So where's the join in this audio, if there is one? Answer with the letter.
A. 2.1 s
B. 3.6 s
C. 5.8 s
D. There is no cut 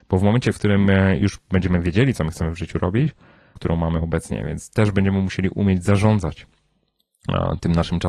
B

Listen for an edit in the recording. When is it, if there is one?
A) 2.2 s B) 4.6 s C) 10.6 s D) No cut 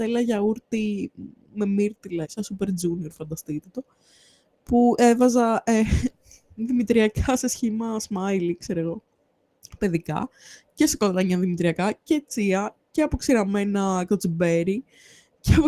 A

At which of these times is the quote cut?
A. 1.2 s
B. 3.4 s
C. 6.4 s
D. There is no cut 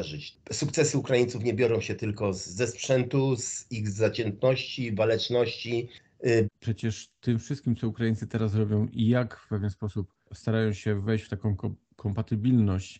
C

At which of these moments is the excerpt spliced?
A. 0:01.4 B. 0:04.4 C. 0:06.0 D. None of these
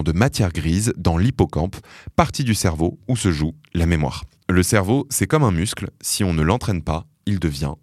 B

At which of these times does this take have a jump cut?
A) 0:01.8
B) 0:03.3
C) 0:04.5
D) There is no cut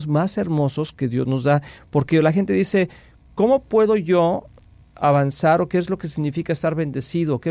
D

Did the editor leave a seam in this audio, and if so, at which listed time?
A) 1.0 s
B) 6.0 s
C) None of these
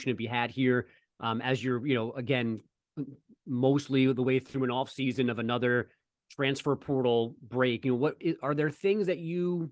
C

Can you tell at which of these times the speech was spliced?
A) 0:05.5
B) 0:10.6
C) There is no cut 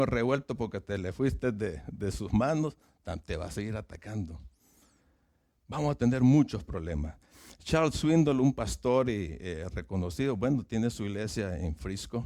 C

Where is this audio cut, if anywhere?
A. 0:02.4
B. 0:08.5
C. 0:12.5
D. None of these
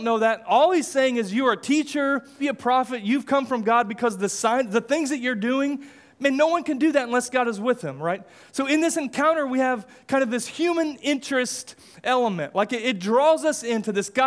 A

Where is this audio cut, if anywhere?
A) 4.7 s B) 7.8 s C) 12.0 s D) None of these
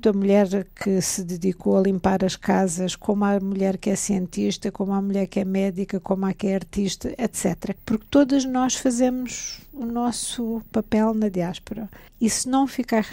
D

